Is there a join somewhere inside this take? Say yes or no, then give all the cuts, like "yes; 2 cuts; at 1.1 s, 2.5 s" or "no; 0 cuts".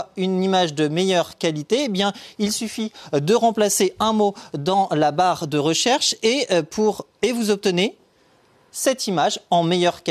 no; 0 cuts